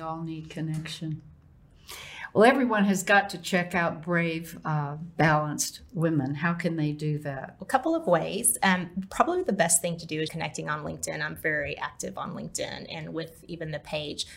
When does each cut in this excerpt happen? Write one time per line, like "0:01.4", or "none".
0:10.3